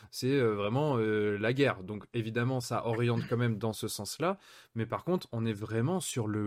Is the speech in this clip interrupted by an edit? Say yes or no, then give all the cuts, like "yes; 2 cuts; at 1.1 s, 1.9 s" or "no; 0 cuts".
no; 0 cuts